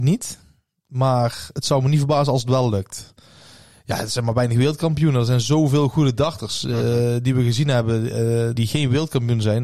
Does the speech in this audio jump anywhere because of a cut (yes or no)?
yes